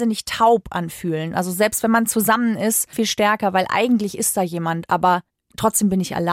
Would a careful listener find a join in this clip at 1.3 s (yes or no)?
no